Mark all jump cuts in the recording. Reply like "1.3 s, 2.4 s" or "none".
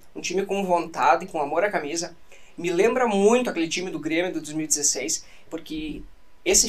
5.5 s